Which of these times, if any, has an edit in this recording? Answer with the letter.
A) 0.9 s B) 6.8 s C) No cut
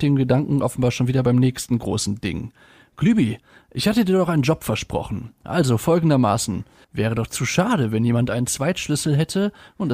B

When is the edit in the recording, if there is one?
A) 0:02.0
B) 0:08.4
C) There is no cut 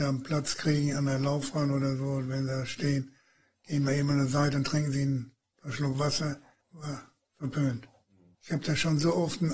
C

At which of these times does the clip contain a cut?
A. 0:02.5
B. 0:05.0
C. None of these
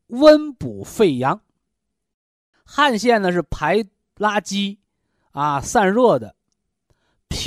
A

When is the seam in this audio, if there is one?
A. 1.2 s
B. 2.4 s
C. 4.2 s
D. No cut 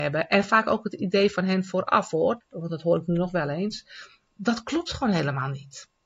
B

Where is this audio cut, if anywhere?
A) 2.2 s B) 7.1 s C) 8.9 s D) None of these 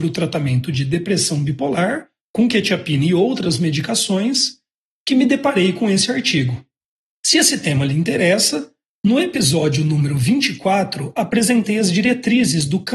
B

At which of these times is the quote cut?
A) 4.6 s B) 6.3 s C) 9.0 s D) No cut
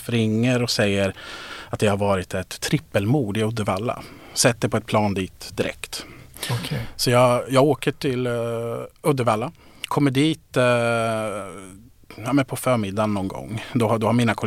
D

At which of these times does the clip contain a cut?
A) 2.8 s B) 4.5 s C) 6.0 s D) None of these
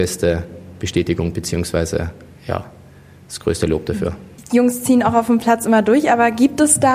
D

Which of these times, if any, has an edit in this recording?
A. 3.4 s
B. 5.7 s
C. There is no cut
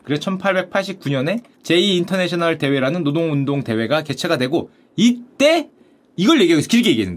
C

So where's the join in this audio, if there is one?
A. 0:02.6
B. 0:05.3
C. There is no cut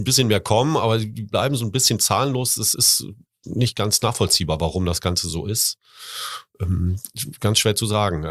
C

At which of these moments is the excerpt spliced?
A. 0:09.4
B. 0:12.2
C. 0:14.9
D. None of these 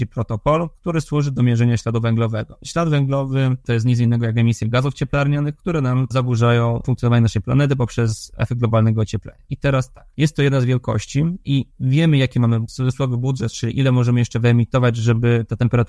D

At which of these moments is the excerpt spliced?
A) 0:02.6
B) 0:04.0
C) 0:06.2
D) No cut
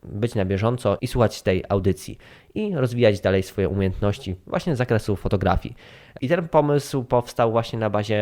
D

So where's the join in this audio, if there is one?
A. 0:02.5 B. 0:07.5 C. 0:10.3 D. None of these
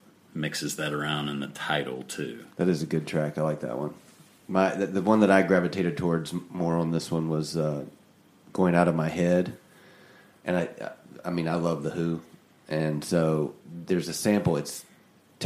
A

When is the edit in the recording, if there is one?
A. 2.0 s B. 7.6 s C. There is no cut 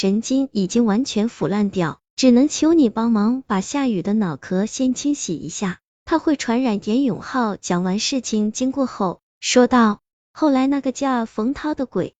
A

